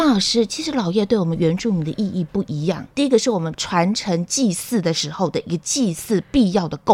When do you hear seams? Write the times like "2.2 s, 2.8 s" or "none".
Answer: 2.9 s